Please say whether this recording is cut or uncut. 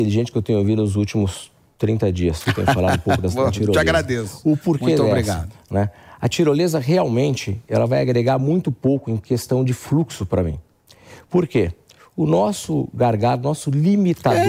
uncut